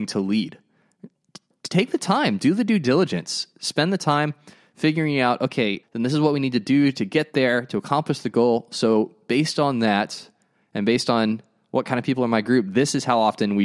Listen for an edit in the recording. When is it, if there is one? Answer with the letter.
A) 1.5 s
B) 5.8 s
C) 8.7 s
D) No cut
B